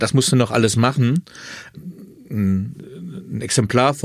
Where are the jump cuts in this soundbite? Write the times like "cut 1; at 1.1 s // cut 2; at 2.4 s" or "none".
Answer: cut 1; at 1.7 s

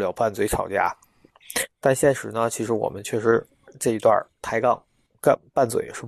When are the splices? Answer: none

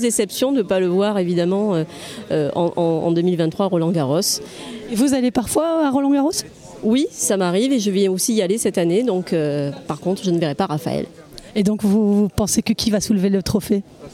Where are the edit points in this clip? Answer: none

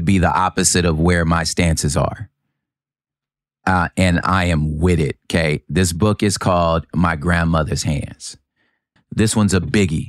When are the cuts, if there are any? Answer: cut 1; at 9.0 s

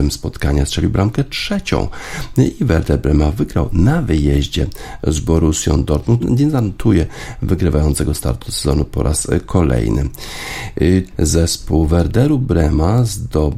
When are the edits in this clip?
cut 1; at 6.2 s // cut 2; at 11.1 s

